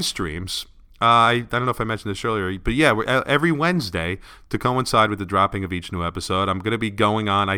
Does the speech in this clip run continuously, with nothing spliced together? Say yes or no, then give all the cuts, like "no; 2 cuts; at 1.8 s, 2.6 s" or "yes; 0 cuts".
yes; 0 cuts